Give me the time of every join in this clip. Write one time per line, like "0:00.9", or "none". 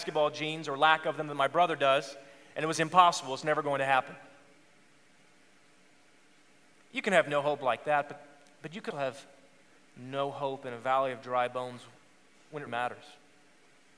0:08.9
0:12.7